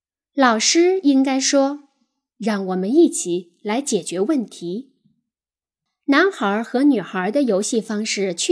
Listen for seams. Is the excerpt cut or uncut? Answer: cut